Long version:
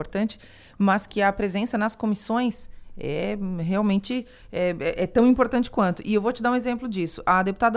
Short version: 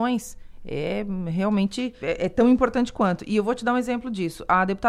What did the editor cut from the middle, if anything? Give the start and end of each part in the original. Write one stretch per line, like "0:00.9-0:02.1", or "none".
0:04.3-0:04.8